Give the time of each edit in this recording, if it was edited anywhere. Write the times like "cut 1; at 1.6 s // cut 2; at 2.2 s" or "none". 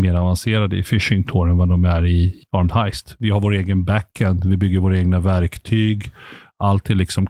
none